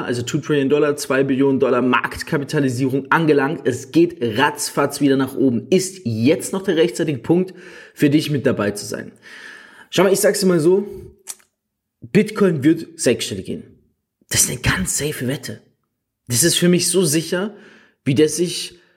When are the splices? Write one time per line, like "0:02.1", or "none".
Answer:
none